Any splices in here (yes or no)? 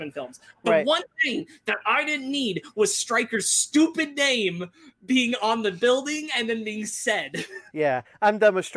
yes